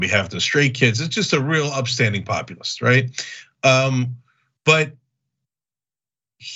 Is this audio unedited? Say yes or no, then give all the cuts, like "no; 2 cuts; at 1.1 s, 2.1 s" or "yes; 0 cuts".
yes; 0 cuts